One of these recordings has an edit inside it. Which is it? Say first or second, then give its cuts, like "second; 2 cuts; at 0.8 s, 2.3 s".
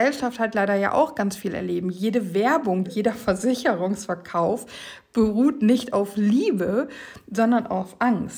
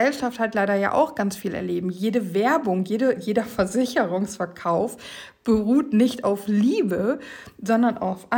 first; 1 cut; at 2.8 s